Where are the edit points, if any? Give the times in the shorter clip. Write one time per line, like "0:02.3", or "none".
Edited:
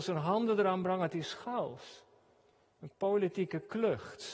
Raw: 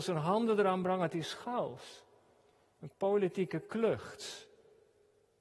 none